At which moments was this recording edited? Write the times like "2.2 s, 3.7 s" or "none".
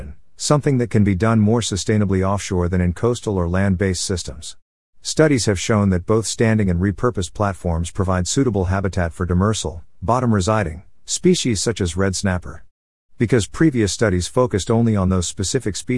none